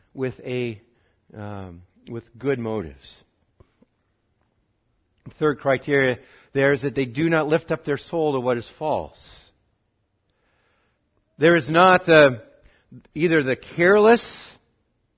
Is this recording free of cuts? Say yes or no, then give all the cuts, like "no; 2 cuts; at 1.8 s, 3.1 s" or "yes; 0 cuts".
yes; 0 cuts